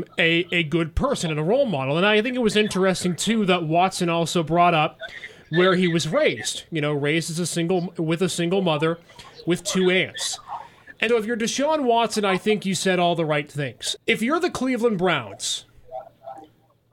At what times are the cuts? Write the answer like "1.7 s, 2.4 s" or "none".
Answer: 11.1 s, 14.0 s